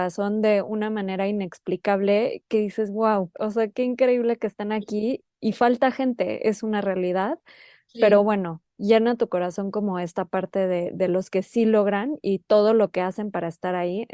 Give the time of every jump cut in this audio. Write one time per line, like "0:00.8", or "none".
0:03.3

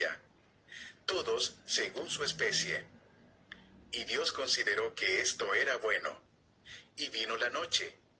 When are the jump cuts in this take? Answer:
none

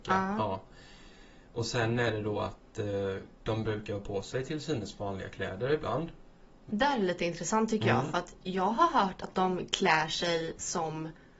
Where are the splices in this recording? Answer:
none

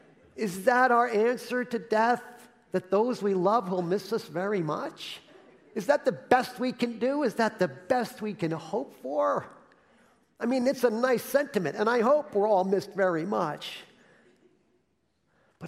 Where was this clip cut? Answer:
none

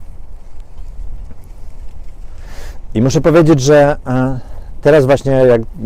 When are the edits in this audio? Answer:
none

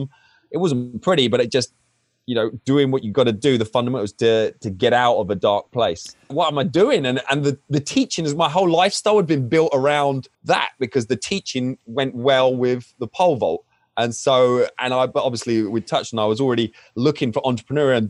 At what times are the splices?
0:06.3
0:10.3

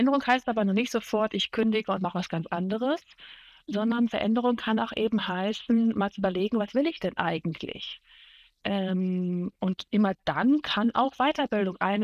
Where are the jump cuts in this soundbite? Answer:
none

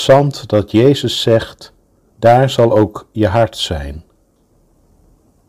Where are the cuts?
0:02.1

